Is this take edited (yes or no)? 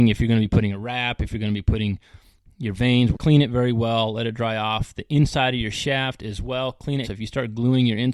yes